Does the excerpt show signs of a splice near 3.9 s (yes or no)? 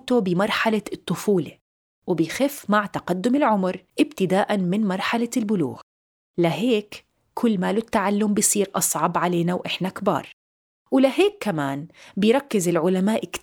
yes